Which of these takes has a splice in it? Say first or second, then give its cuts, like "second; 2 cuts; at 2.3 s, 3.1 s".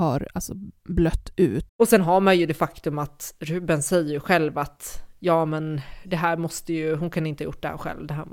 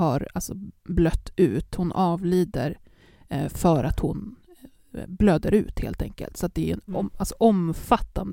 first; 1 cut; at 1.7 s